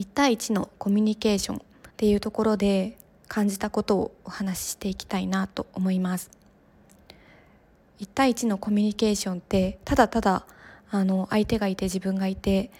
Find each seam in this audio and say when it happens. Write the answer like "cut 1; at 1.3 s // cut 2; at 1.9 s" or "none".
cut 1; at 1.9 s